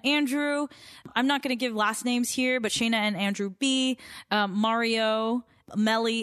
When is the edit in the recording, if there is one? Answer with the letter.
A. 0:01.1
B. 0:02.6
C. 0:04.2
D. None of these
D